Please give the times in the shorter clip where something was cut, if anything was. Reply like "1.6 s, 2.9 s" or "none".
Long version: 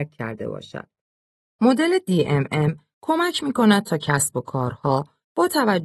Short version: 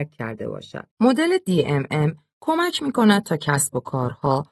0.9 s